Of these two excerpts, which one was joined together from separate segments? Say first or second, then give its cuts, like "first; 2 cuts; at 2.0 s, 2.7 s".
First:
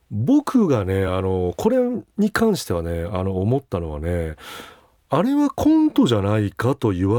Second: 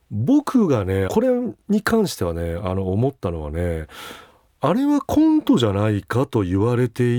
second; 1 cut; at 1.1 s